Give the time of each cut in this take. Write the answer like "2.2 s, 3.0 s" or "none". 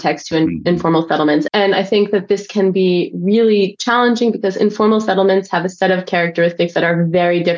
1.5 s